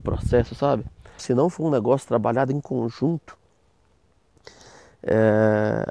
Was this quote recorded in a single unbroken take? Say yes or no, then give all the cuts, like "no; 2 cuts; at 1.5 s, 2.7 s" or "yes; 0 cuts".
no; 1 cut; at 1.2 s